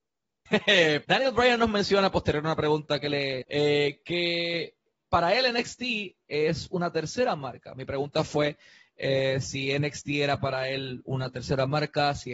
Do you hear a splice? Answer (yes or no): yes